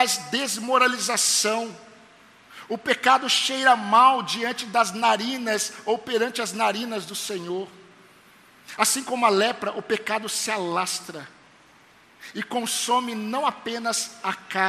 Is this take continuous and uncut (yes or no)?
yes